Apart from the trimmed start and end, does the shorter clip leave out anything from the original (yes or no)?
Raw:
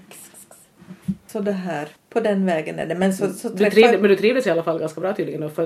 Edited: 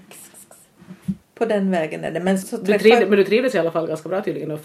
yes